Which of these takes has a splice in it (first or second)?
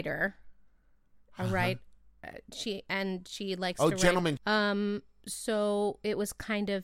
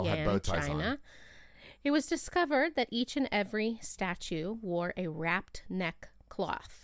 first